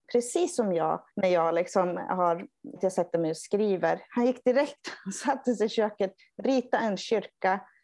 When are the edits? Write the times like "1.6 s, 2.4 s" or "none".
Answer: 1.1 s, 2.8 s

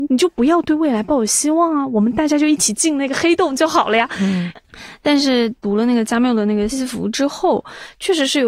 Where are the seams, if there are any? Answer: 4.6 s, 6.7 s

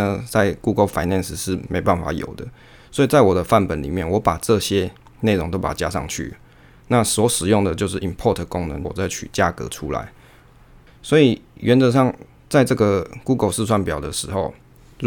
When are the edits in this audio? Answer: 8.8 s, 10.9 s

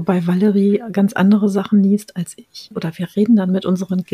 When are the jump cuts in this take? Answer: 2.7 s

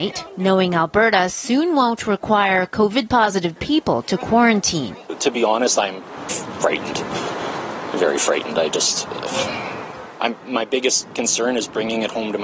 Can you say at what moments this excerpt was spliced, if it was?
6.3 s

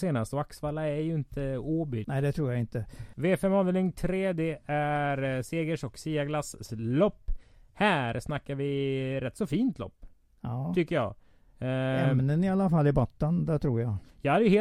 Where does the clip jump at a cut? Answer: 2.0 s, 3.1 s

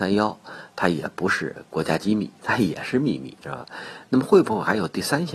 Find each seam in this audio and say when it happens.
4.1 s

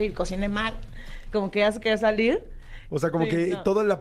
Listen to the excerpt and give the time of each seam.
1.3 s, 2.9 s

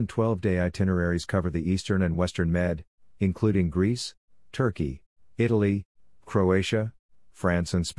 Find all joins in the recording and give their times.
none

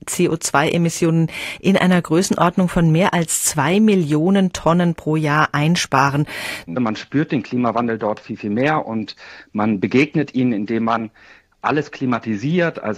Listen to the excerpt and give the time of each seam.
6.7 s

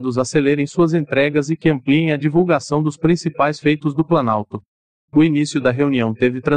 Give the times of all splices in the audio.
5.0 s

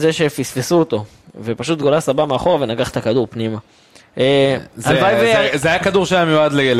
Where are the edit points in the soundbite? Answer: none

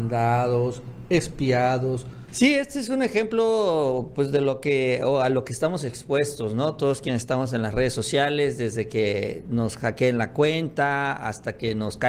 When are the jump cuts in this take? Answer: 2.3 s

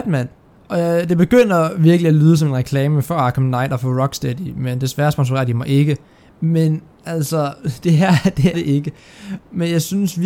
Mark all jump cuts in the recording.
8.5 s

